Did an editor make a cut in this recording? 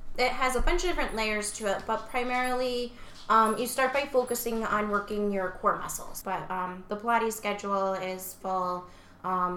yes; 2 cuts; at 6.2 s, 8.4 s

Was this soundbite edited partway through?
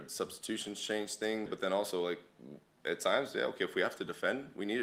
yes; 1 cut; at 1.5 s

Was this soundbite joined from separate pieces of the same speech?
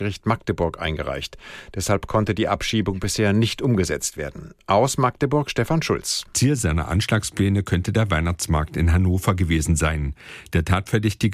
no; 0 cuts

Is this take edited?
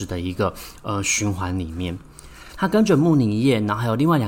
yes; 1 cut; at 2.5 s

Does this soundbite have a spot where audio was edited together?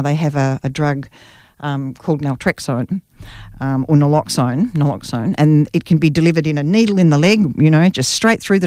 no; 0 cuts

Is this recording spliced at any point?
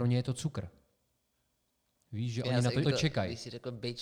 yes; 1 cut; at 2.8 s

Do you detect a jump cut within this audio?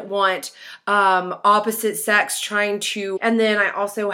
yes; 1 cut; at 3.2 s

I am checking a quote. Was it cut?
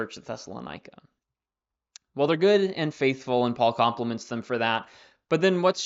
no; 0 cuts

